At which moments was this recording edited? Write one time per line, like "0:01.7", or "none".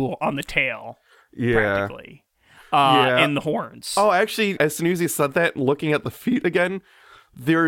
0:04.6